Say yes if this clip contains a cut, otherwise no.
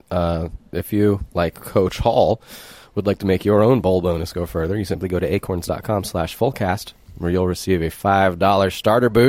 no